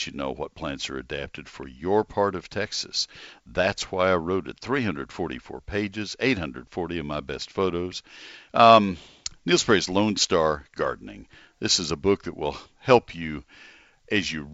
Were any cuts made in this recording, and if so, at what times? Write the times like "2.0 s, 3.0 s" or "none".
8.5 s